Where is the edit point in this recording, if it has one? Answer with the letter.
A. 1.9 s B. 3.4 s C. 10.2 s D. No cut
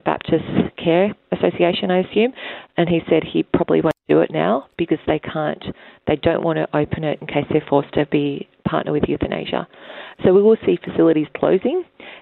D